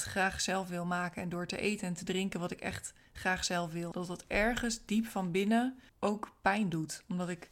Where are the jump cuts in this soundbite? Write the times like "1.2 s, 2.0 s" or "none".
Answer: 3.9 s, 5.9 s